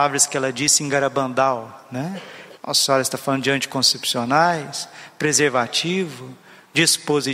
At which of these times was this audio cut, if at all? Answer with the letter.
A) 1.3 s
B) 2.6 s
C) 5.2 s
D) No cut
B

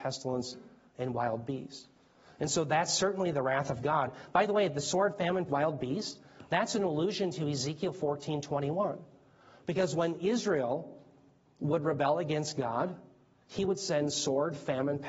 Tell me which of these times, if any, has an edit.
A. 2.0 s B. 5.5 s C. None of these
B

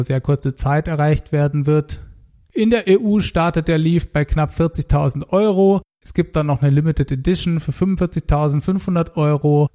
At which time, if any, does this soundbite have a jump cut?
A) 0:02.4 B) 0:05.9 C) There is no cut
C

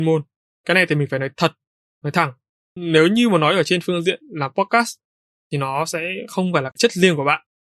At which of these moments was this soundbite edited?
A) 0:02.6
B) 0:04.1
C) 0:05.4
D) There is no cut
A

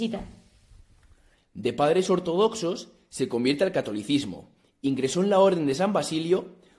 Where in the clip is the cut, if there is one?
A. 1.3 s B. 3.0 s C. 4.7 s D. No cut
A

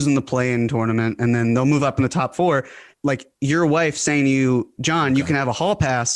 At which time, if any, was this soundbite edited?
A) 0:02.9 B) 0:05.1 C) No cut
A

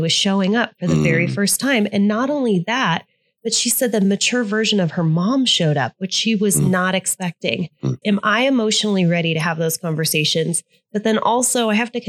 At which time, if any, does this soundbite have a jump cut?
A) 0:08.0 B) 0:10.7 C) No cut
A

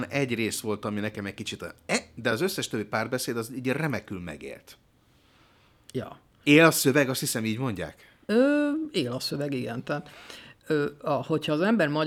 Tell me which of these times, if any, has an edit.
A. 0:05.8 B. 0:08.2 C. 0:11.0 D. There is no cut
B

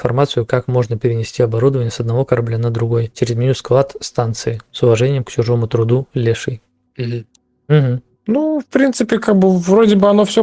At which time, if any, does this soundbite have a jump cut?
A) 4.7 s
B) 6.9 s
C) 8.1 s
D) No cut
A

